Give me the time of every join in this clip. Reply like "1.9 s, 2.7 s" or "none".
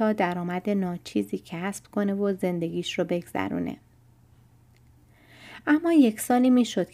none